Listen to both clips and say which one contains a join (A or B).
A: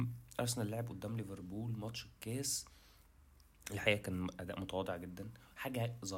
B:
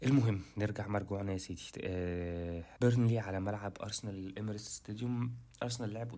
B